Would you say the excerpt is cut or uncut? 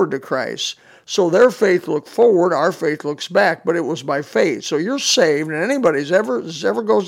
uncut